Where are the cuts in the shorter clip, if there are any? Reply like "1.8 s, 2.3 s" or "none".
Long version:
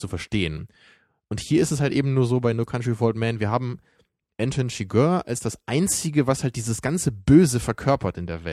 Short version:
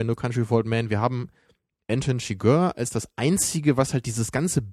none